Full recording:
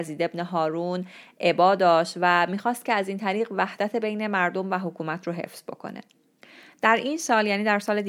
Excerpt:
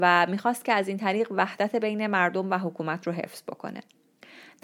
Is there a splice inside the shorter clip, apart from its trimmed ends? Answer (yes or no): no